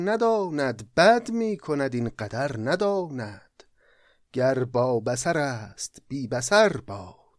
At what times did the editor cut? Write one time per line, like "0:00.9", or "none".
none